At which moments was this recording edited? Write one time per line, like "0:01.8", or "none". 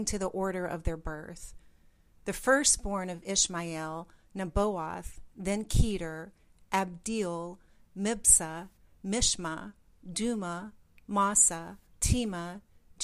0:11.9

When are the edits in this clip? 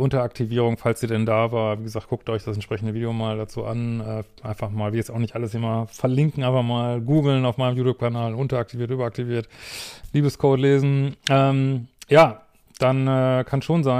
none

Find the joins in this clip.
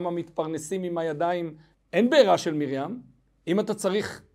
0:01.7

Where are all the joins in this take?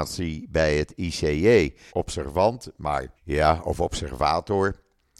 0:01.9
0:03.2

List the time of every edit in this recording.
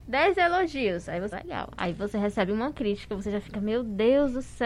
0:01.3

